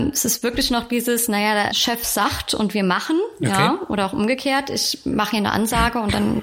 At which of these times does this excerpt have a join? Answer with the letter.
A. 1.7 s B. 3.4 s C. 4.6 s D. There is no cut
A